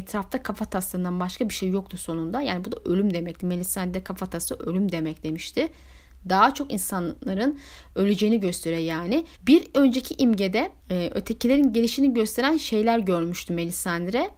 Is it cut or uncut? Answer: cut